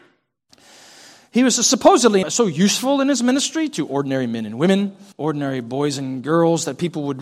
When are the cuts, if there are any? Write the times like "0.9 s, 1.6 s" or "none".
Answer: 2.2 s, 5.1 s

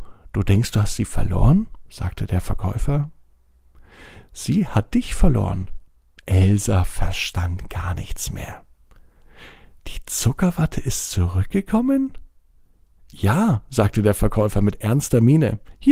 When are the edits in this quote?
none

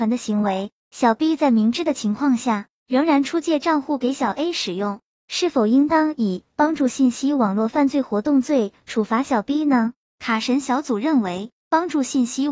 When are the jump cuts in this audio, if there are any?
5.1 s

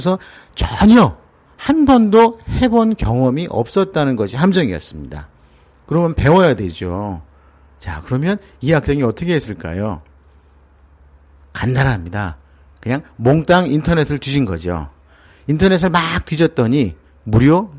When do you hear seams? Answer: none

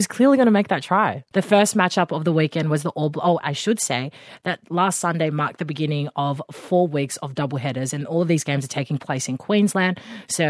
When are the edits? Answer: 1.3 s, 3.4 s

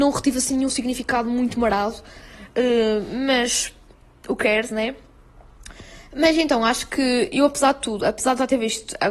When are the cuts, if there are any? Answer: none

